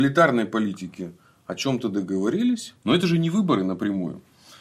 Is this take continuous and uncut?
no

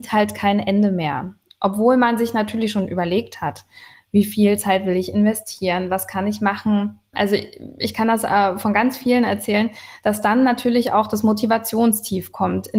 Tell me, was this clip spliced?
yes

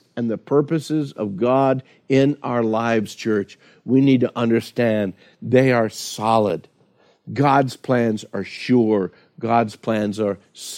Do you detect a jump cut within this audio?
no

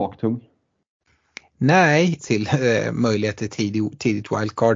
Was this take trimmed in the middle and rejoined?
yes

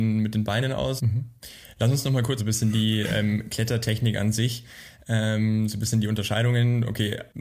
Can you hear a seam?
yes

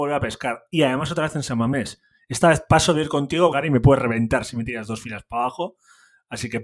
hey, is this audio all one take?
no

